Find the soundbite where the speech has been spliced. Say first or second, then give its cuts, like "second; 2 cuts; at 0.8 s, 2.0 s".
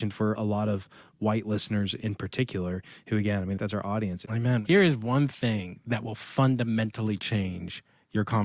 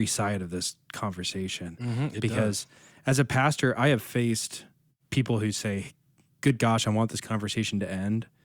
first; 1 cut; at 4.2 s